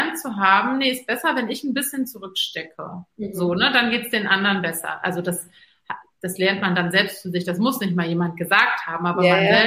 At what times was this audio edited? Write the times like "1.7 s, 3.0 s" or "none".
none